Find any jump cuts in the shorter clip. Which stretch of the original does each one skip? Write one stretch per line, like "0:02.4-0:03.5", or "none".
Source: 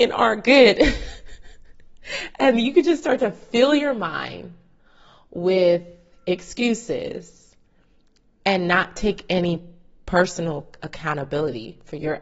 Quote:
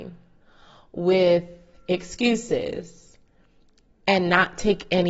none